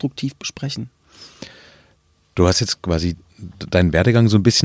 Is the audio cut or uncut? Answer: uncut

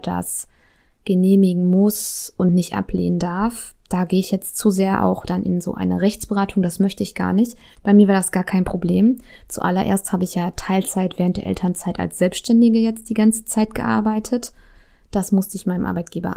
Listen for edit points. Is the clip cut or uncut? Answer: cut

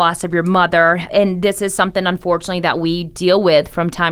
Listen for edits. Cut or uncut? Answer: uncut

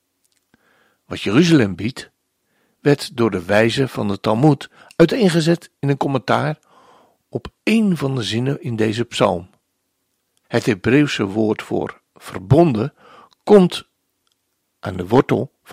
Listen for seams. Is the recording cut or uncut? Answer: cut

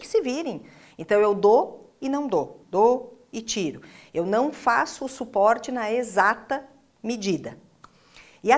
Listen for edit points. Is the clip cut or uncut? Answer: cut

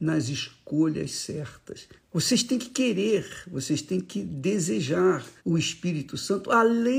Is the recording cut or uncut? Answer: cut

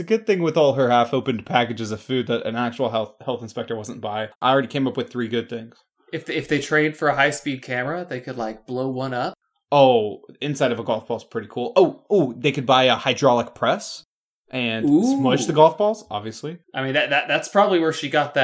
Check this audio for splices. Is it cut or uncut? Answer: cut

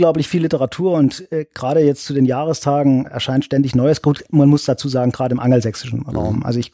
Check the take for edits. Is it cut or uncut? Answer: cut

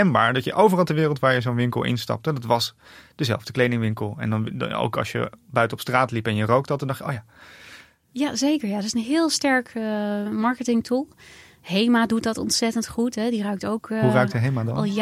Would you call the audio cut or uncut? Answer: uncut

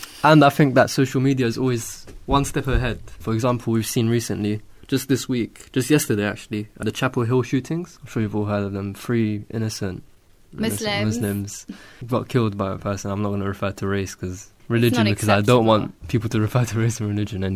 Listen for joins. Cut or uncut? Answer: uncut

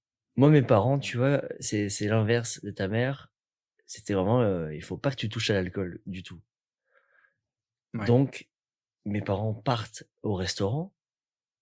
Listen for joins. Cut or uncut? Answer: uncut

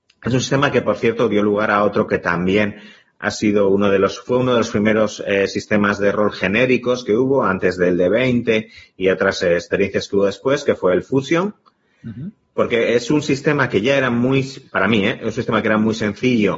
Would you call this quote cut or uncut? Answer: cut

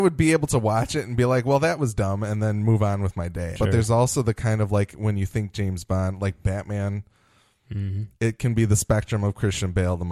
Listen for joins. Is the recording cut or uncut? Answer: cut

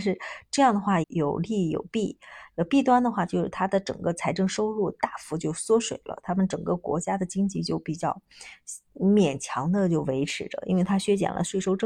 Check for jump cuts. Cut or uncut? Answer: cut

